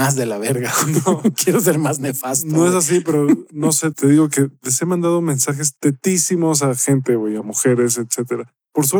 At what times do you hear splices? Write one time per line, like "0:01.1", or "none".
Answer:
none